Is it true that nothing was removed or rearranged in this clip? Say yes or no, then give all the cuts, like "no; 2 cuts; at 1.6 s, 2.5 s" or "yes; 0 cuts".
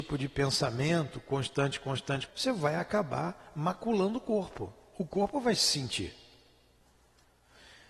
no; 1 cut; at 2.3 s